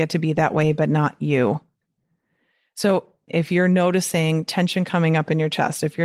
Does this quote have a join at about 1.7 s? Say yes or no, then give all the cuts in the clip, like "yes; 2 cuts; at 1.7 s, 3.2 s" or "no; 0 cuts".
no; 1 cut; at 3.3 s